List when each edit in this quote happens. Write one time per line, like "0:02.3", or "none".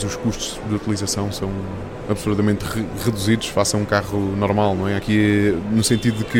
0:05.0